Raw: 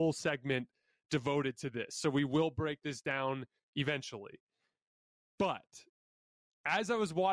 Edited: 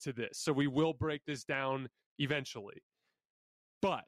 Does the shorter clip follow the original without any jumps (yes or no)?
yes